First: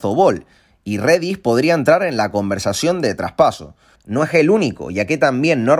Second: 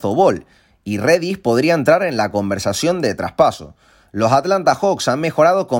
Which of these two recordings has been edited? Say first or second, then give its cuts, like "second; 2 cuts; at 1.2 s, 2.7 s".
first; 1 cut; at 4.0 s